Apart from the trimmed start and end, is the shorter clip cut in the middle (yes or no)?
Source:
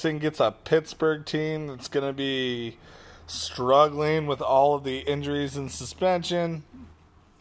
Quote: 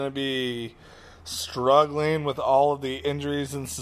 no